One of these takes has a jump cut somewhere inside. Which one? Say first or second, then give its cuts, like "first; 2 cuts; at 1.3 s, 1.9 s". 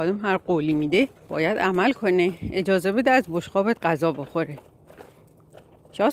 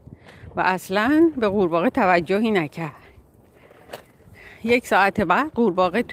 first; 1 cut; at 1.2 s